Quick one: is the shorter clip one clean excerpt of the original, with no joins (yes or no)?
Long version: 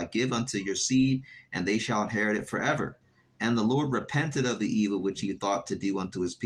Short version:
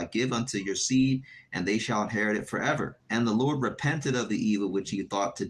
no